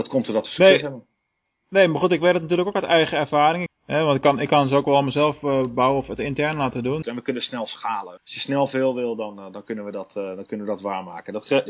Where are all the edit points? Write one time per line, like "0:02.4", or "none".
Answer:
0:03.7
0:07.0
0:08.2